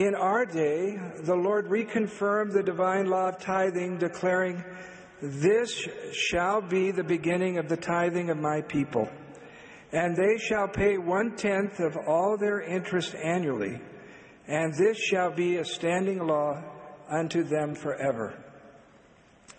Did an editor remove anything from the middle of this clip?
no; 0 cuts

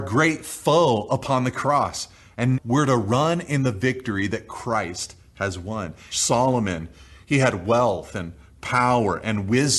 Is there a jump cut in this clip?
yes; 2 cuts; at 2.5 s, 6.1 s

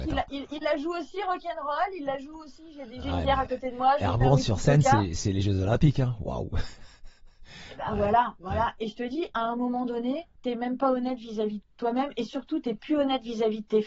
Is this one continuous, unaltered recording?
no; 1 cut; at 10.4 s

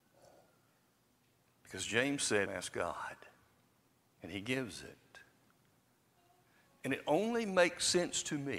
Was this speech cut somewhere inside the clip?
yes; 1 cut; at 2.5 s

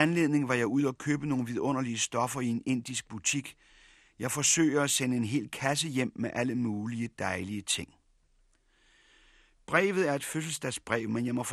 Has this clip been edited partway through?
no; 0 cuts

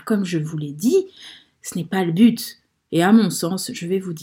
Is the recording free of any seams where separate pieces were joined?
no; 1 cut; at 2.9 s

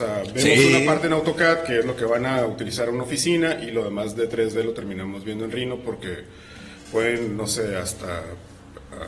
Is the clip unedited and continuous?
yes; 0 cuts

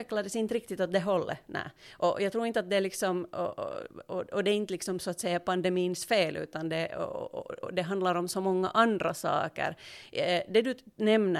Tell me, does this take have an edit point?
no; 0 cuts

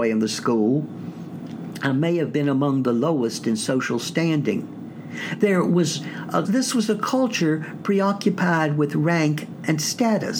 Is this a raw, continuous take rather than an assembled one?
no; 1 cut; at 6.4 s

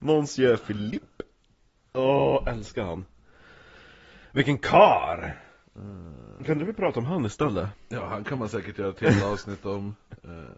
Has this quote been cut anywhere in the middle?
no; 0 cuts

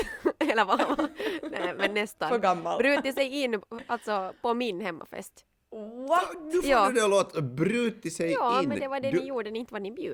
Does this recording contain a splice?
no; 0 cuts

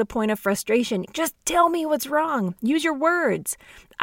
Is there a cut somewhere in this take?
yes; 1 cut; at 1.1 s

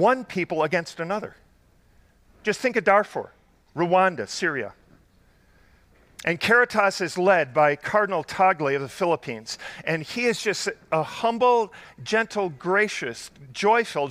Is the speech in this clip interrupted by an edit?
no; 0 cuts

